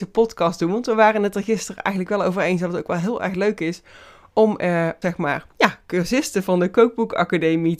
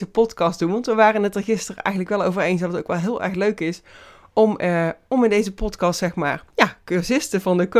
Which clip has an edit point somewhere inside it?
first; 1 cut; at 5.0 s

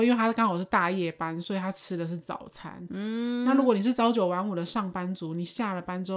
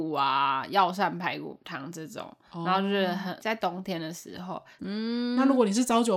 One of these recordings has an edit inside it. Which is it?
second; 2 cuts; at 3.4 s, 4.8 s

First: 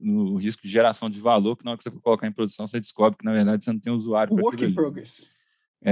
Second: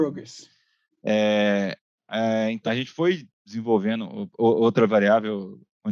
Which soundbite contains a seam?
second; 2 cuts; at 0.9 s, 2.7 s

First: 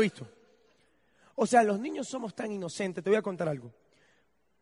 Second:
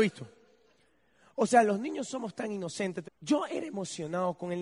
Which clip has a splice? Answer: second; 1 cut; at 3.0 s

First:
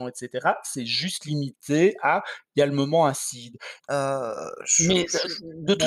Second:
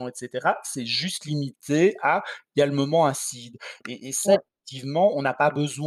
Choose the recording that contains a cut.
first; 1 cut; at 3.8 s

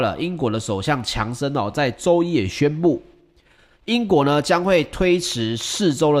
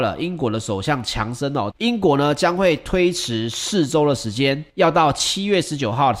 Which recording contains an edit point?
second; 2 cuts; at 1.7 s, 4.7 s

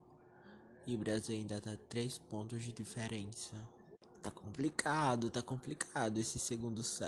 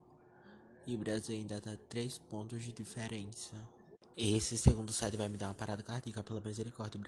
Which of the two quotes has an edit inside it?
second; 1 cut; at 4.1 s

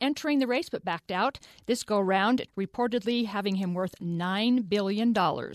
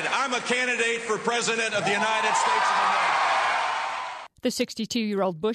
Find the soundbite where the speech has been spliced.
first; 1 cut; at 2.5 s

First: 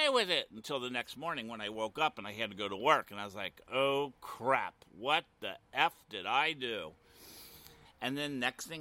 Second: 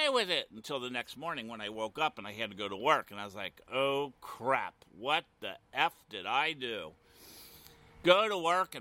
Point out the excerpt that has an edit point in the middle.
first; 1 cut; at 7.9 s

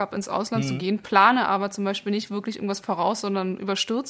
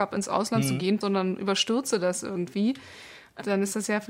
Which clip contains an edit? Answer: second; 1 cut; at 1.0 s

